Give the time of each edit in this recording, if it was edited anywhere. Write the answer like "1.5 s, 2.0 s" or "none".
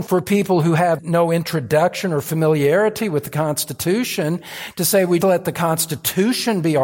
5.2 s

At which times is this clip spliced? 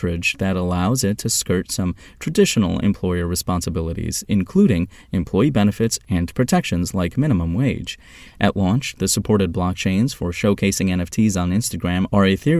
8.3 s

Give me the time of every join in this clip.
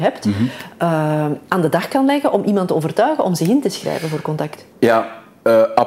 4.7 s

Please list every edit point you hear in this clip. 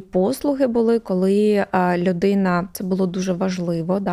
2.7 s

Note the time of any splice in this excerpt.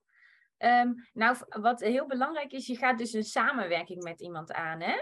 none

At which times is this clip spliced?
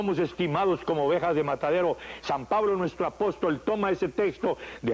none

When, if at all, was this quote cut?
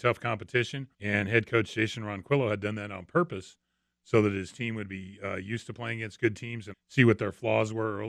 0.9 s, 6.7 s

